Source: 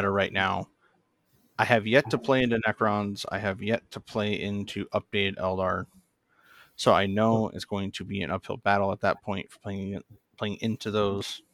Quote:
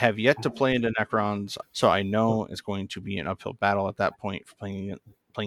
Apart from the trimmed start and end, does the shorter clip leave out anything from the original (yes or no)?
yes